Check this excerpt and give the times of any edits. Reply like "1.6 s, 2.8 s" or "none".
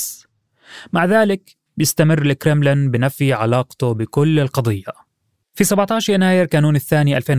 none